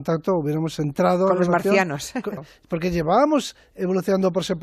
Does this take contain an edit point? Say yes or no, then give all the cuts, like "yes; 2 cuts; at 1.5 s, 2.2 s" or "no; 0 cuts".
yes; 1 cut; at 2.4 s